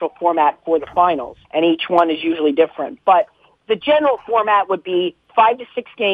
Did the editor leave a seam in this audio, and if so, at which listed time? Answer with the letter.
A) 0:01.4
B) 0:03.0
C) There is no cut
A